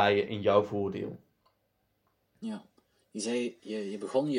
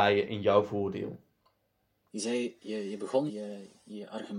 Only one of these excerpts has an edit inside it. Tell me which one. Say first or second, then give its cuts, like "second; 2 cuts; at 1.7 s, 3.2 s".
second; 2 cuts; at 2.1 s, 3.3 s